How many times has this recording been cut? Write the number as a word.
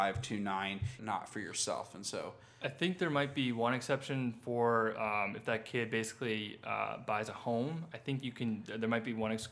one